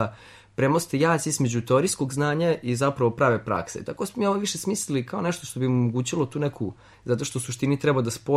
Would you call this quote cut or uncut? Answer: cut